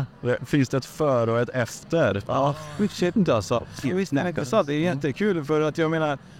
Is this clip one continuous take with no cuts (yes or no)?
no